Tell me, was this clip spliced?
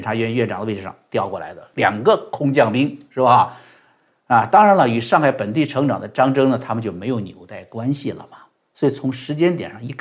no; 0 cuts

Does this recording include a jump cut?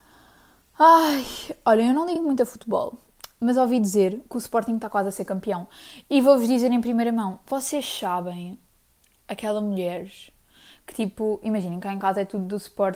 no; 0 cuts

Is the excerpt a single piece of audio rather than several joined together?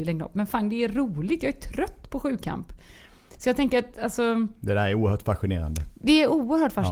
yes; 0 cuts

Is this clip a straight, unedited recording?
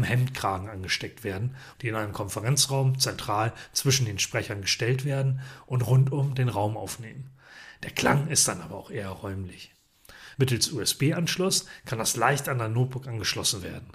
no; 2 cuts; at 1.7 s, 10.3 s

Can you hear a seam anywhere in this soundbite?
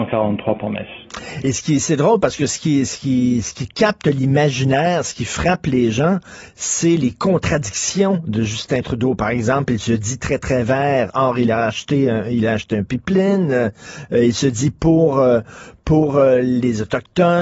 no; 0 cuts

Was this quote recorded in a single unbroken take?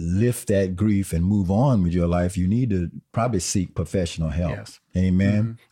yes; 0 cuts

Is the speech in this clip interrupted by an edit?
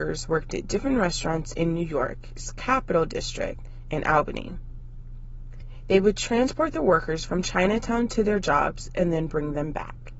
no; 0 cuts

